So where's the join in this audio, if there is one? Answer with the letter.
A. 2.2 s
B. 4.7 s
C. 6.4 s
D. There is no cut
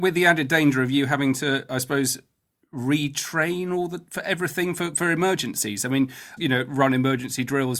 C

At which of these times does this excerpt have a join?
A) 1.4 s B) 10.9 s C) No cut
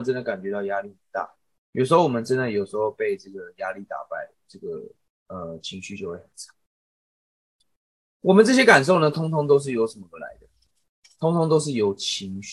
C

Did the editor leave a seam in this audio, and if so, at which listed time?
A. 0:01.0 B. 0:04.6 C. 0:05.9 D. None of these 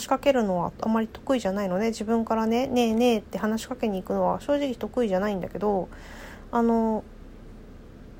D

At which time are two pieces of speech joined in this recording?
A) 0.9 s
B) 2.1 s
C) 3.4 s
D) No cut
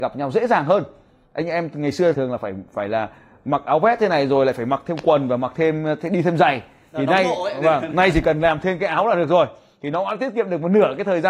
B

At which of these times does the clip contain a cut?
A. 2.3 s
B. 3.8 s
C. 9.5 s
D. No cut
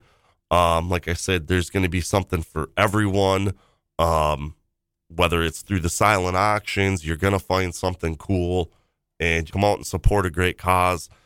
C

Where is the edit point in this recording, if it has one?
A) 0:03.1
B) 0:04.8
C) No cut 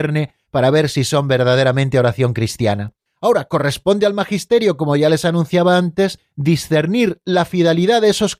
A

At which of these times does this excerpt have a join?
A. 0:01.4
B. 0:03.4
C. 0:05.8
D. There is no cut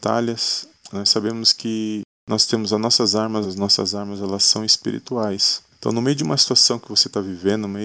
B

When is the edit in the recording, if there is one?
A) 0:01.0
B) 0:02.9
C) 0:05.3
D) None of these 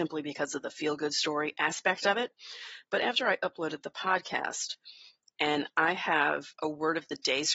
C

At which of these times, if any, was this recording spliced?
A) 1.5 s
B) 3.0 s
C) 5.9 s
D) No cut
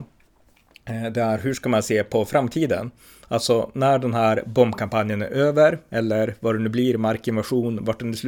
D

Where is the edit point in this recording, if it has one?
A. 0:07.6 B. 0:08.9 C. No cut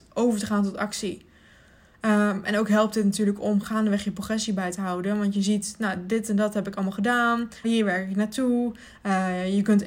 A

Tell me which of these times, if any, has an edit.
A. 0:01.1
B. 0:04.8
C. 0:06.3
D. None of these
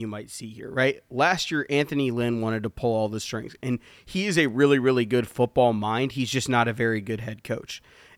D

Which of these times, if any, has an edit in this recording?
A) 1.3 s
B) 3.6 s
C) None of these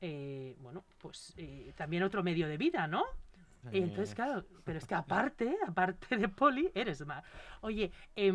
B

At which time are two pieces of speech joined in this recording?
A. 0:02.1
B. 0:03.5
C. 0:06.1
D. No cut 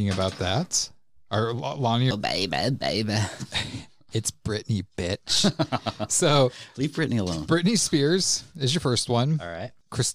A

